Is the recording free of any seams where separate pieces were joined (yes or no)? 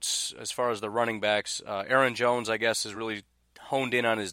yes